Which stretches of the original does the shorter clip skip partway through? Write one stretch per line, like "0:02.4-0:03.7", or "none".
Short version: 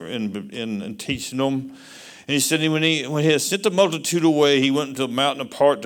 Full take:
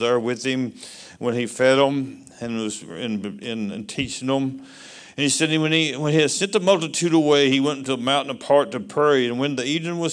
none